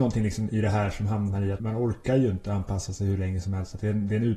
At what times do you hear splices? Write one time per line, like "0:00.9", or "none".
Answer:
0:01.6